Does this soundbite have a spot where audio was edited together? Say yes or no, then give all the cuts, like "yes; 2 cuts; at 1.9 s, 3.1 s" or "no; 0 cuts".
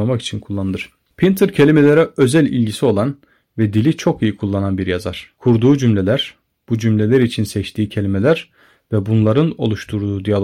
no; 0 cuts